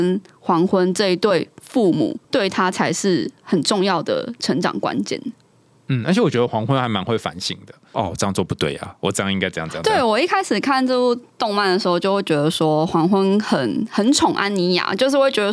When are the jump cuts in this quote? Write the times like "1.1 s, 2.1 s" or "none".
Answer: 2.2 s, 7.9 s